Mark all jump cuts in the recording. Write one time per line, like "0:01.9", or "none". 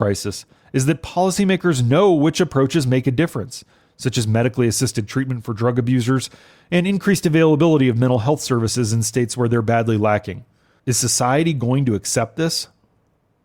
0:10.8